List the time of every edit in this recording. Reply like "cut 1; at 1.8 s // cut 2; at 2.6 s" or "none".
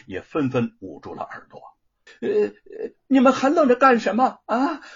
cut 1; at 2.1 s